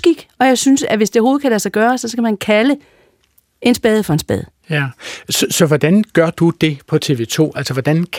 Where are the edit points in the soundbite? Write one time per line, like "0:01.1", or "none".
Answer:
none